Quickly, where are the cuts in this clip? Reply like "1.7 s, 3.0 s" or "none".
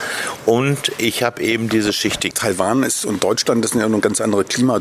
none